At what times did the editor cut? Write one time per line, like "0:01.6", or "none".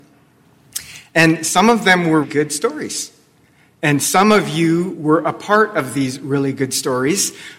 0:02.2